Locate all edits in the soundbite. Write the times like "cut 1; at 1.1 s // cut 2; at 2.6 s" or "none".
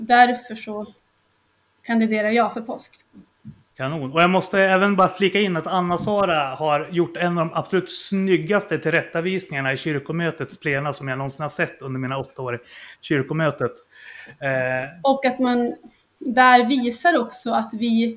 cut 1; at 3.7 s // cut 2; at 15.0 s

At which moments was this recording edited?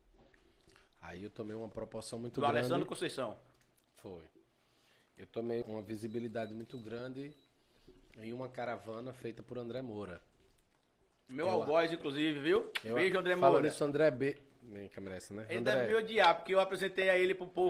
cut 1; at 5.6 s

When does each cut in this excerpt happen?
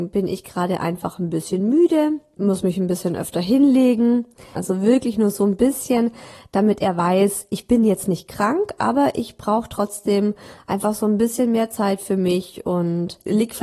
cut 1; at 4.6 s

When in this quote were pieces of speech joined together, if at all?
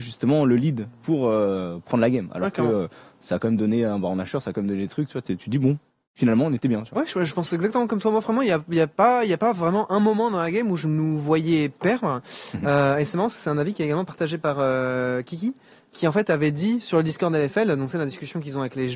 none

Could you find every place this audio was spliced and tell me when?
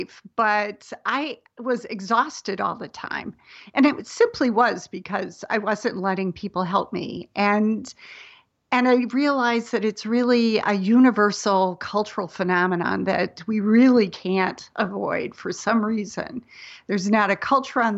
none

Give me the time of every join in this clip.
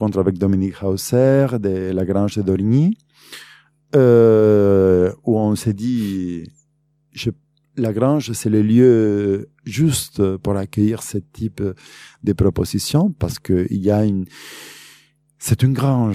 none

